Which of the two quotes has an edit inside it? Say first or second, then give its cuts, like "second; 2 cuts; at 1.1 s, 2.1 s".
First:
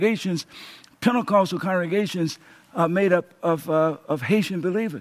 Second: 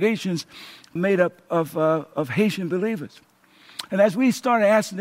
second; 1 cut; at 1.0 s